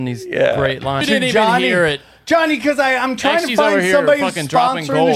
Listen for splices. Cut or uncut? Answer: cut